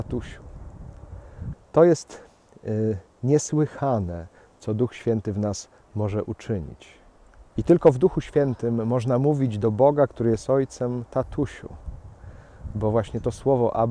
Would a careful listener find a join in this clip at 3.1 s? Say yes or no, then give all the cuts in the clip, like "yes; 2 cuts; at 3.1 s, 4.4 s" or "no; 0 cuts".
no; 2 cuts; at 1.5 s, 7.6 s